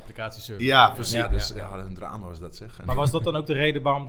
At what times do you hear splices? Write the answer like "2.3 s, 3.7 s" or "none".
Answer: 1.2 s